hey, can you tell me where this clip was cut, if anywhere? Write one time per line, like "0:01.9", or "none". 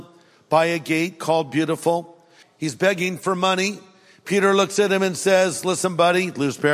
0:02.4

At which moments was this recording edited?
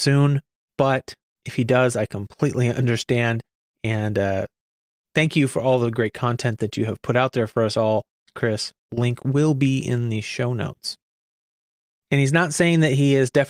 0:08.9
0:12.0

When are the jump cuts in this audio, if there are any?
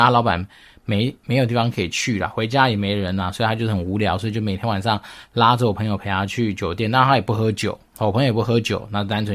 none

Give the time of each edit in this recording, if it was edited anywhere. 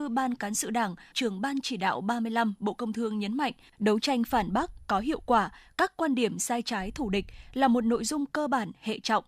0:01.1
0:03.7

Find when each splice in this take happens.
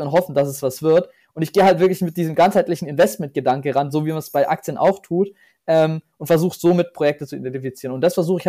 none

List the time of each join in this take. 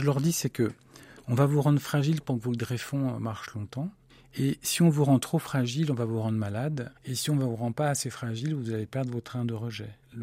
0:07.0

